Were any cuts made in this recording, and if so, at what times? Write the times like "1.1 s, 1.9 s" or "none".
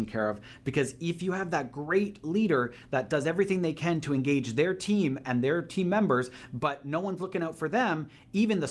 none